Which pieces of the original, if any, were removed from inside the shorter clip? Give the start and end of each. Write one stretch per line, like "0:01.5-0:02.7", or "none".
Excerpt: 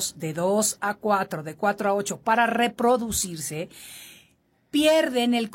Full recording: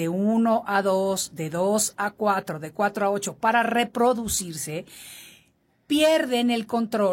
none